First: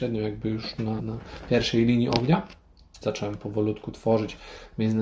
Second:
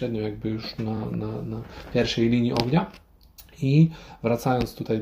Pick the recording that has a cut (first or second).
first